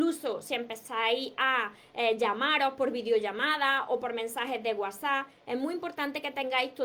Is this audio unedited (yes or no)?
yes